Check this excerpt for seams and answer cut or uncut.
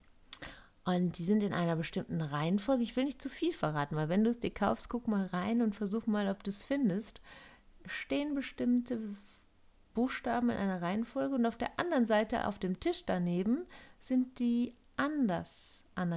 uncut